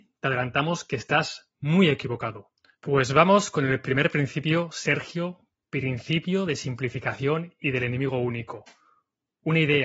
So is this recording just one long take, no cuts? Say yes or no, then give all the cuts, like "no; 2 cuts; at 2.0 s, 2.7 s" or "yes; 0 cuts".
no; 1 cut; at 2.7 s